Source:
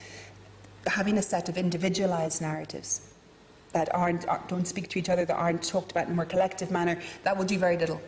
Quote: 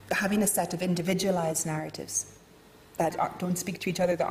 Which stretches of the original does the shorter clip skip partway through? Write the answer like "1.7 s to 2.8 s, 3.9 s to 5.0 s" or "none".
3.9 s to 4.2 s